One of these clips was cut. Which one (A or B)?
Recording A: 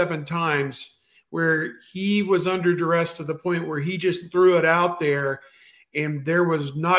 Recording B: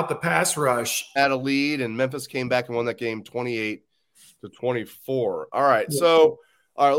B